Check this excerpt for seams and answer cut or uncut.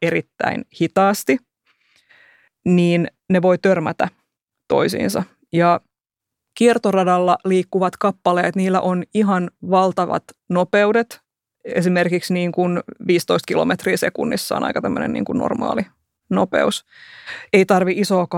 uncut